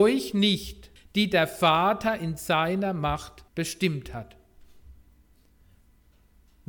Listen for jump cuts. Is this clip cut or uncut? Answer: cut